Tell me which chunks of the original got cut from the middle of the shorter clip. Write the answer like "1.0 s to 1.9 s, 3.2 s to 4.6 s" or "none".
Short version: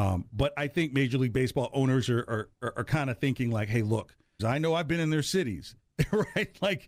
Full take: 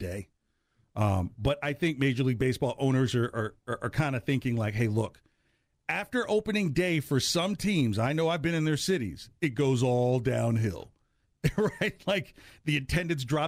5.4 s to 7.9 s, 9.3 s to 11.2 s